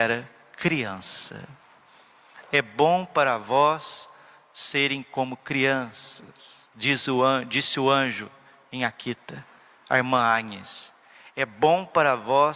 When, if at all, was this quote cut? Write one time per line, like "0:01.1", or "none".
none